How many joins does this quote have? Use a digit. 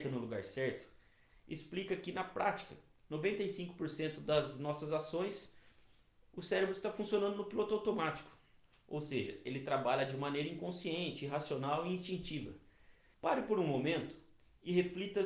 1